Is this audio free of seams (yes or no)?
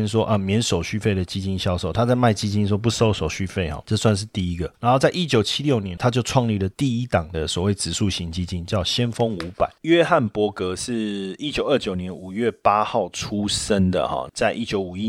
yes